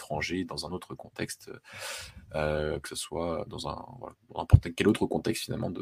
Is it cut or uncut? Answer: uncut